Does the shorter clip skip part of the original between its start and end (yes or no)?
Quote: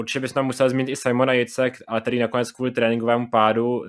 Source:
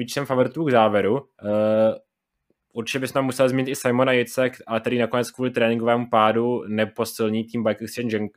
no